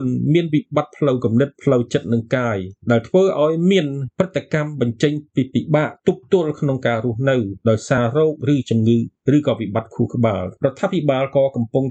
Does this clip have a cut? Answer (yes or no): no